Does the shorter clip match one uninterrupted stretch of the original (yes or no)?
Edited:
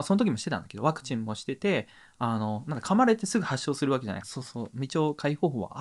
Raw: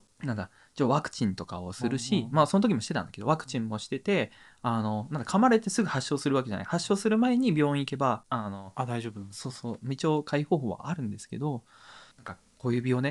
no